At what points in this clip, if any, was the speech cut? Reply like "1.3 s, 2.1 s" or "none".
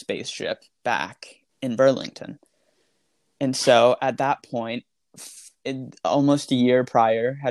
none